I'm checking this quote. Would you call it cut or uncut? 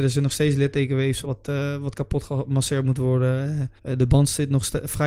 cut